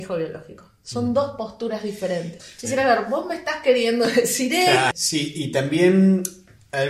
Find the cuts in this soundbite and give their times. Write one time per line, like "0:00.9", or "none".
0:02.4
0:04.9